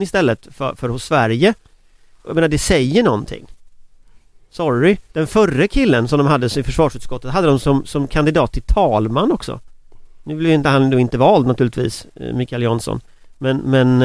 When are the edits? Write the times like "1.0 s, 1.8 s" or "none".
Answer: 5.1 s